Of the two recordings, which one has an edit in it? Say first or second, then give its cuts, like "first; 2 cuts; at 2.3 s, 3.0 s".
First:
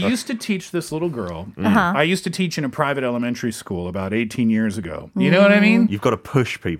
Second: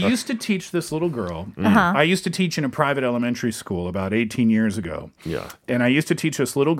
first; 1 cut; at 5.1 s